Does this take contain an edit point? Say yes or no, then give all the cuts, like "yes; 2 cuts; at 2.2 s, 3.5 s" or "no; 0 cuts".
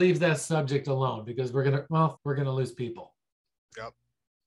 yes; 1 cut; at 2.2 s